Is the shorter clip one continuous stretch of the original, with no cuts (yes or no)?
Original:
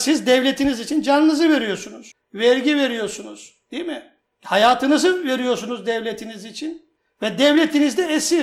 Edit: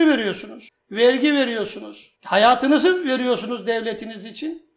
no